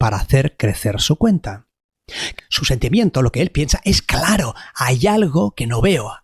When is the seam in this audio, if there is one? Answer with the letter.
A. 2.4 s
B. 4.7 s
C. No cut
A